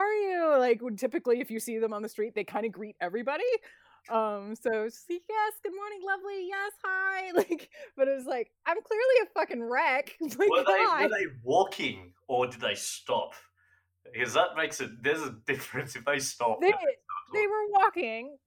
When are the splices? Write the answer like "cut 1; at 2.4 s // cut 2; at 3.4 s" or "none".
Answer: none

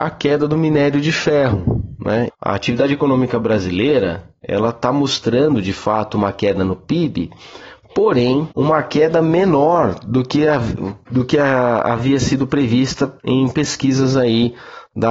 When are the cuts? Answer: cut 1; at 2.3 s // cut 2; at 8.5 s // cut 3; at 13.2 s

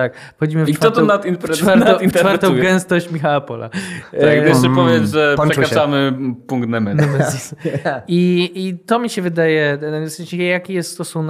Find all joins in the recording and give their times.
none

